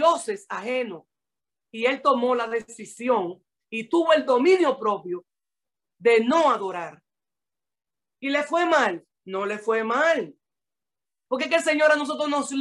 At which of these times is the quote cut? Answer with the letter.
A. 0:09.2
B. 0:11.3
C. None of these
B